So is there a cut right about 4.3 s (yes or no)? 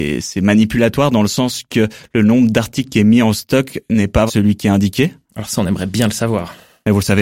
yes